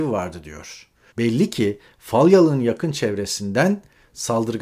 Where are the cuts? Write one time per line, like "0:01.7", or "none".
0:01.1

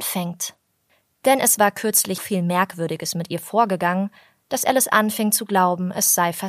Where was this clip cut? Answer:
0:02.2

